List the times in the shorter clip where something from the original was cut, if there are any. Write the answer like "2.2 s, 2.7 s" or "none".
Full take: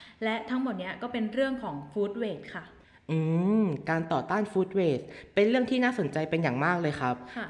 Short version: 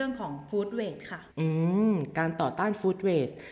1.3 s